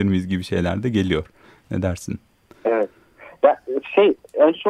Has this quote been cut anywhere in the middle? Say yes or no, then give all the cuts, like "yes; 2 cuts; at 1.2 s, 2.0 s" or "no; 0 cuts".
no; 0 cuts